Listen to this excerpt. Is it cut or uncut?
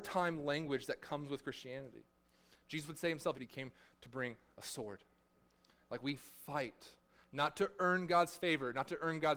cut